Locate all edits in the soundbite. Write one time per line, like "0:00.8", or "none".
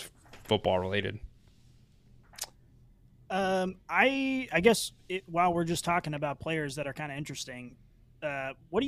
none